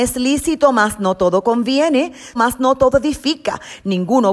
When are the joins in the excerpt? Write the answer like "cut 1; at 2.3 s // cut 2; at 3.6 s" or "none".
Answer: cut 1; at 2.4 s